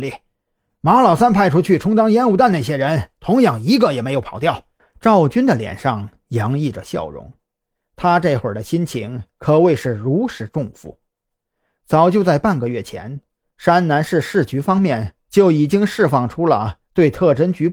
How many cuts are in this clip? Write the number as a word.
one